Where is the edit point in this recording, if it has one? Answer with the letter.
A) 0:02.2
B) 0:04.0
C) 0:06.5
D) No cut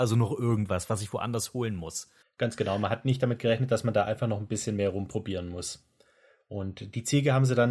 A